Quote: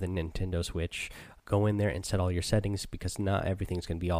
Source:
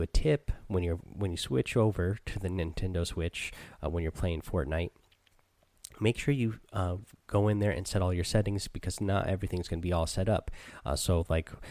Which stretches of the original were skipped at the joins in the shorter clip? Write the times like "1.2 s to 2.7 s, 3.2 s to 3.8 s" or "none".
3.8 s to 7.2 s